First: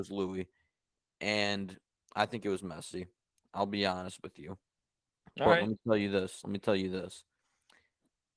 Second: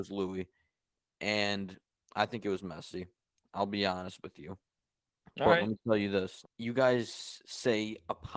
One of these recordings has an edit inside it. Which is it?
second; 1 cut; at 6.4 s

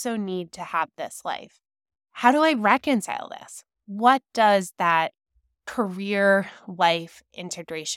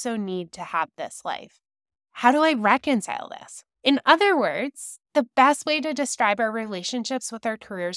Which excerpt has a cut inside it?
second; 2 cuts; at 3.8 s, 5.0 s

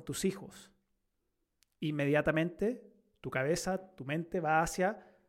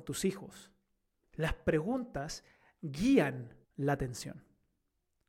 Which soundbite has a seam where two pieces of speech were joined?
second; 2 cuts; at 1.2 s, 3.6 s

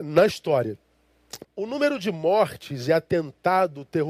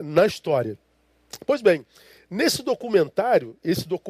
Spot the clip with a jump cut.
first; 1 cut; at 1.4 s

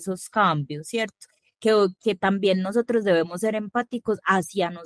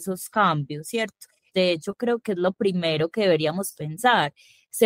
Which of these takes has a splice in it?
second; 1 cut; at 1.5 s

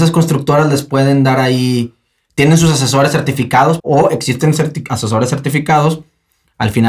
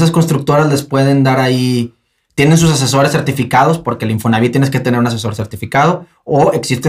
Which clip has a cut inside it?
first; 1 cut; at 3.8 s

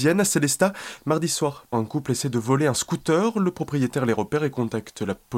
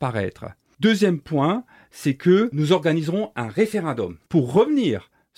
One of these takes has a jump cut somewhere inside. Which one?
first; 1 cut; at 1.7 s

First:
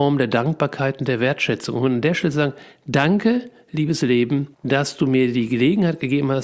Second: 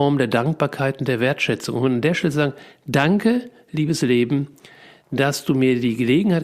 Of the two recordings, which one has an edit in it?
first; 1 cut; at 4.5 s

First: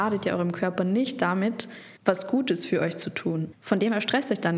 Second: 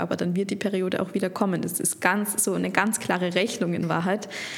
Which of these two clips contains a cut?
first; 2 cuts; at 2.0 s, 3.5 s

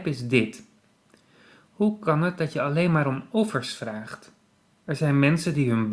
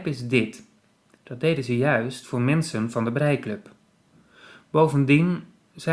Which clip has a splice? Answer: second; 1 cut; at 1.1 s

